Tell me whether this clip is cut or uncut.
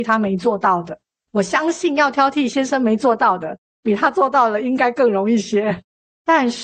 uncut